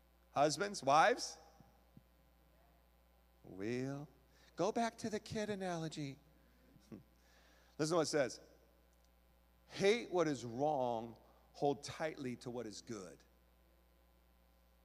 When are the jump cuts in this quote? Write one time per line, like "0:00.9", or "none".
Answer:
0:06.7

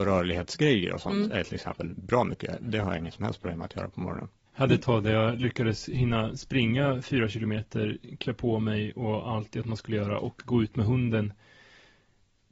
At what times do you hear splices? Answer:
0:04.5

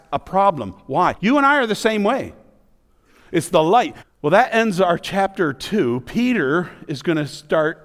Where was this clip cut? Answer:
0:01.2
0:04.0

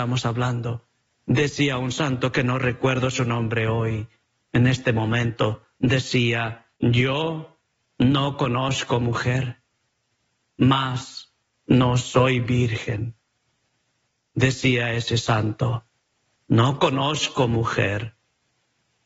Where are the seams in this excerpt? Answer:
0:06.8

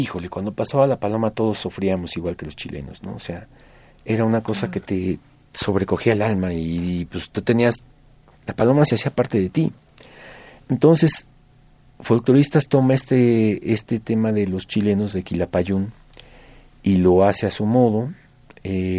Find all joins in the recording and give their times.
0:08.3

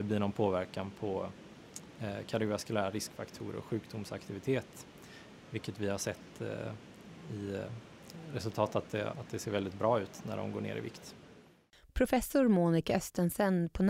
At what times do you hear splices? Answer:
0:09.1

